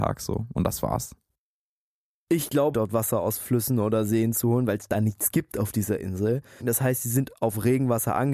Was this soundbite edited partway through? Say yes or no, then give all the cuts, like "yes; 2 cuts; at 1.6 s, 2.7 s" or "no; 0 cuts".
yes; 2 cuts; at 2.7 s, 6.6 s